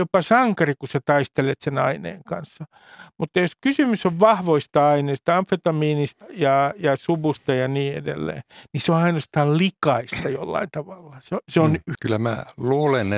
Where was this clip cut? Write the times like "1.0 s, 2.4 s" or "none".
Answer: 6.2 s, 11.9 s